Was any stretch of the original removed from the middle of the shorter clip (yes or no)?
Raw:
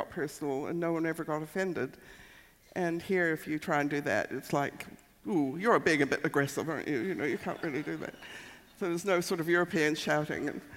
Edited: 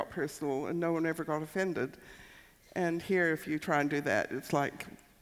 no